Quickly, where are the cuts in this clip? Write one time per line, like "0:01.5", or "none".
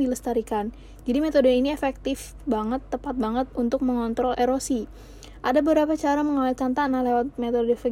0:04.3